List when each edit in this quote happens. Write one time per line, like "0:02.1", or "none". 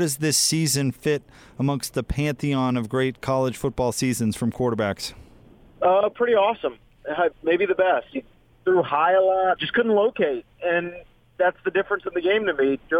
0:08.1
0:09.6